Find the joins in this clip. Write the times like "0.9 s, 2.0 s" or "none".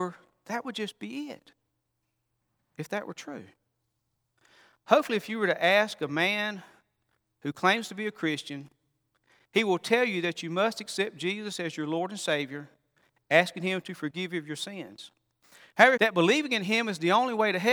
16.0 s